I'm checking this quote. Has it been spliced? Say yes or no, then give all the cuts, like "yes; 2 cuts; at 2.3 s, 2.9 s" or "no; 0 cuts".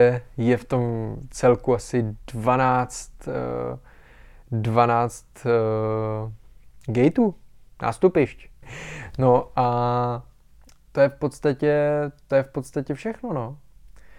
yes; 1 cut; at 8.6 s